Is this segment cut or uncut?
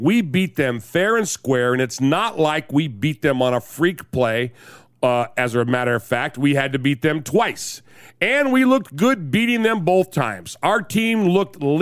uncut